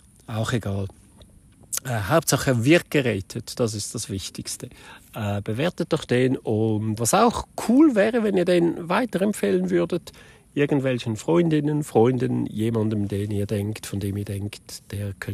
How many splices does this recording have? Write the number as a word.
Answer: one